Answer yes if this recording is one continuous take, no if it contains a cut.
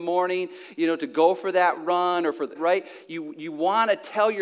no